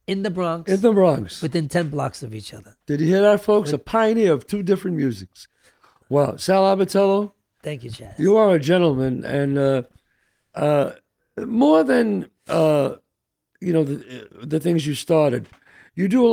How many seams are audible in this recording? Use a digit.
0